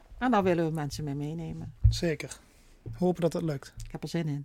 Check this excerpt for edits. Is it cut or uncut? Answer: uncut